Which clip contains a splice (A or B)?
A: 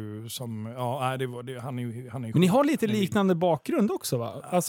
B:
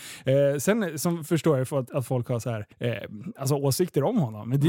B